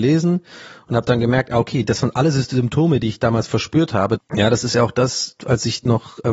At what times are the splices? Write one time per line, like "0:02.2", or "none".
0:04.2
0:05.4

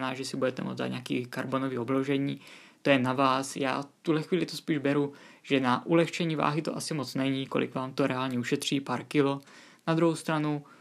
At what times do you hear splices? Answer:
none

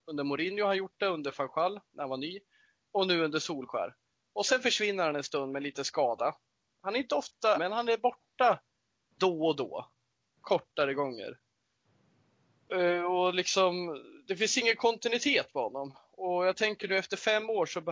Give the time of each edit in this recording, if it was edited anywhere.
0:07.5

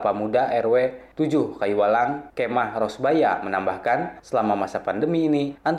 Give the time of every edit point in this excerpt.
none

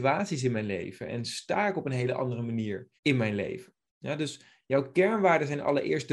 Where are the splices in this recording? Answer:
0:03.0

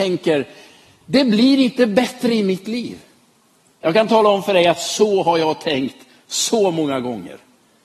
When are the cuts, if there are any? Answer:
0:03.7

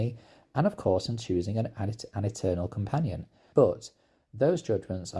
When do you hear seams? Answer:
0:03.5

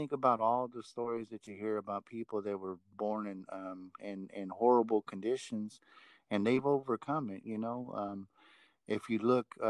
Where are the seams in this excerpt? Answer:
0:04.0

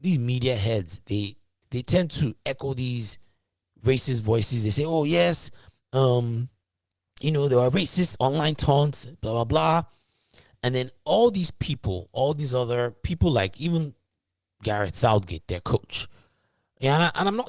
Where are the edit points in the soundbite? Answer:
0:01.6

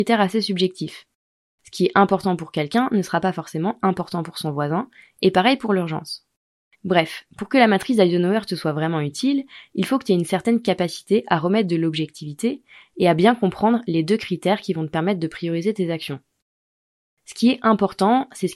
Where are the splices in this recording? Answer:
0:06.7

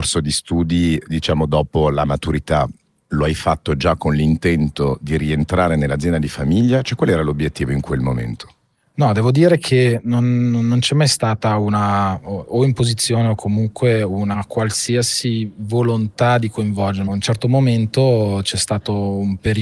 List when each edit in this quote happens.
none

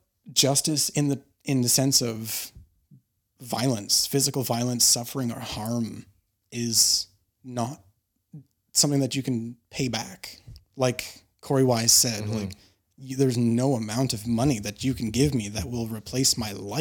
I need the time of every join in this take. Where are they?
0:10.6

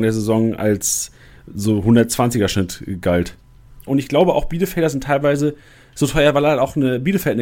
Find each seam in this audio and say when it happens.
0:03.9

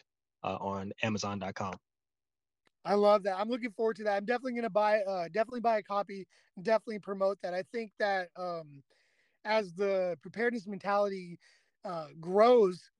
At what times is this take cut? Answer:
none

